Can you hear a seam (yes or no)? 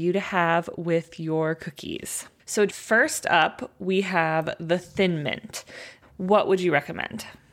yes